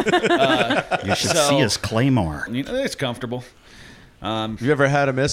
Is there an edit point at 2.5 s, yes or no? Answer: yes